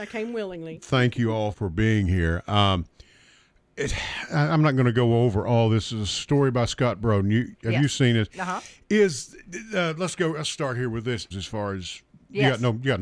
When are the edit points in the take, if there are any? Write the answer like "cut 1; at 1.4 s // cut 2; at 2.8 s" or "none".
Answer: cut 1; at 1.5 s // cut 2; at 11.3 s

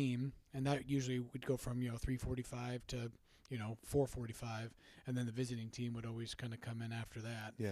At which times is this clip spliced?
none

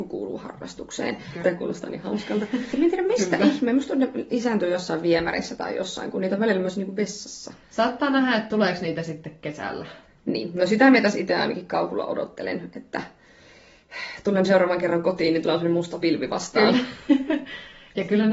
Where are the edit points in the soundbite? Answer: cut 1; at 1.4 s // cut 2; at 2.7 s

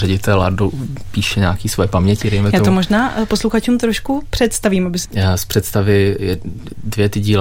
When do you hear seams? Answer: cut 1; at 5.0 s

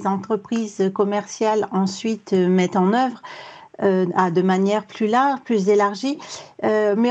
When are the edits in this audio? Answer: none

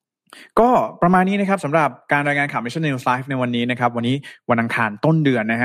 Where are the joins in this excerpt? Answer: none

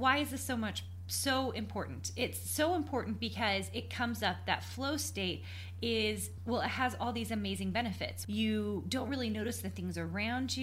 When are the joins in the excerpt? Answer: cut 1; at 6.4 s // cut 2; at 8.2 s

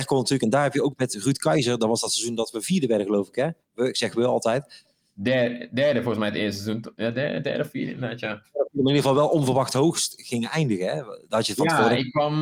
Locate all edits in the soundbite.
none

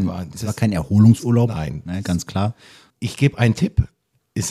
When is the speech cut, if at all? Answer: cut 1; at 2.9 s

